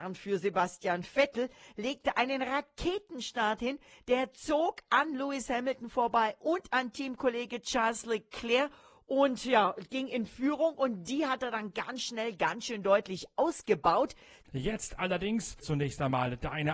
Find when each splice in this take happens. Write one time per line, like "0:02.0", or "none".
0:14.4
0:15.6